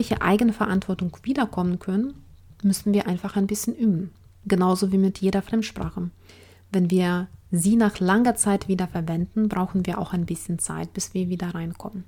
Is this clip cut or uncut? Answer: uncut